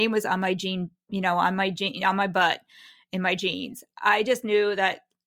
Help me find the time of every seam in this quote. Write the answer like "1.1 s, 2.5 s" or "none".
none